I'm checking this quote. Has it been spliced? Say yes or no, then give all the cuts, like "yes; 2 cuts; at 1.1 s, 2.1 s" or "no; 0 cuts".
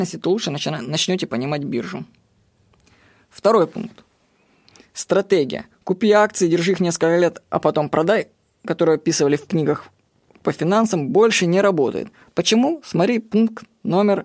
no; 0 cuts